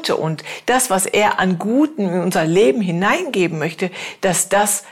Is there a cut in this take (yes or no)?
no